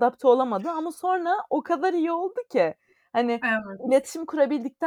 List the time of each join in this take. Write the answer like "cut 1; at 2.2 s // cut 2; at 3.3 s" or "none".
none